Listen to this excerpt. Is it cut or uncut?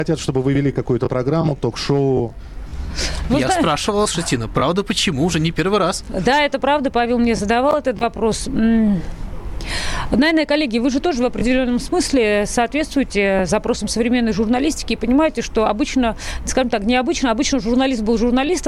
uncut